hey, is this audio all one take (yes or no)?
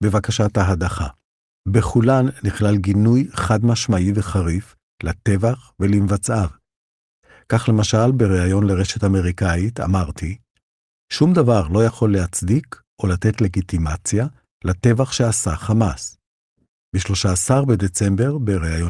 yes